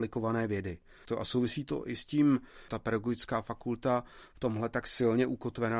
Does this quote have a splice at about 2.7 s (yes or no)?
yes